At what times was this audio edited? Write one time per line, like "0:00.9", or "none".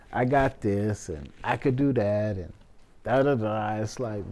none

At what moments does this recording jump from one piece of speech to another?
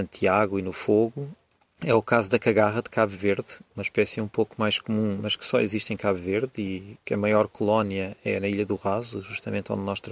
none

